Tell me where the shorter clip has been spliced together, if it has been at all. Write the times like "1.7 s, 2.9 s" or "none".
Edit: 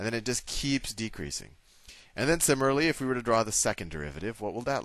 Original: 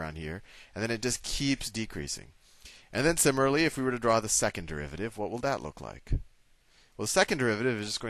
none